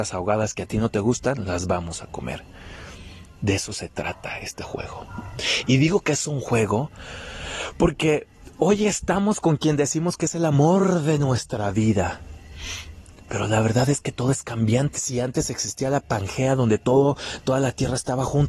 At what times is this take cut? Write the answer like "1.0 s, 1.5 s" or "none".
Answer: 14.9 s